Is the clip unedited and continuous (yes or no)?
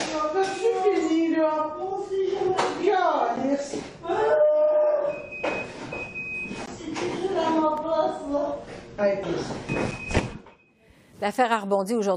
no